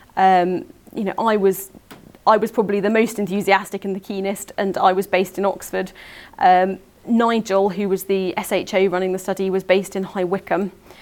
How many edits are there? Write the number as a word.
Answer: zero